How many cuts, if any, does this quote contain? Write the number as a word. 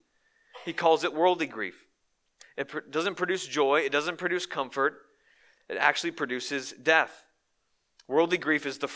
one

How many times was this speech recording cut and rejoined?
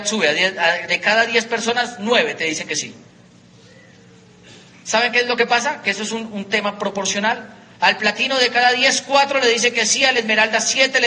two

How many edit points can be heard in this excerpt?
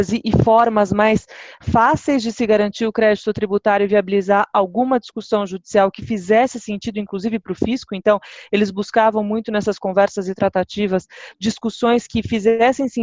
zero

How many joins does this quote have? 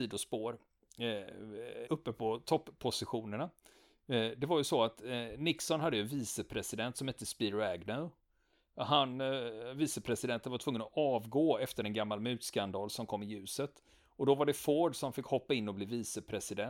one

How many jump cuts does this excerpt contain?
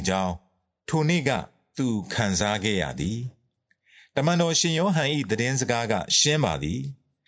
zero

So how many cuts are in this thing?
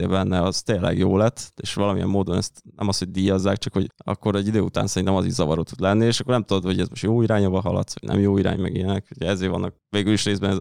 one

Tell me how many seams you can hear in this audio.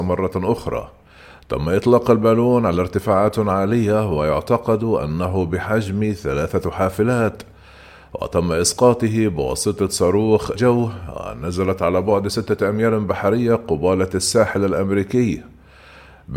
one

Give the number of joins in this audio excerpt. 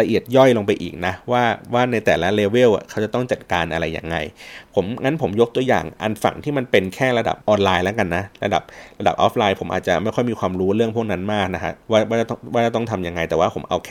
two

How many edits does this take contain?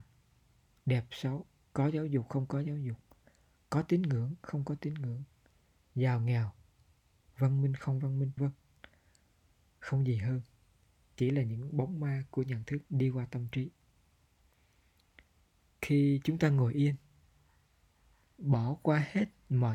two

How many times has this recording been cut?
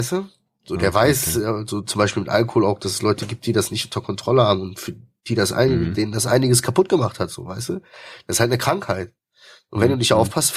zero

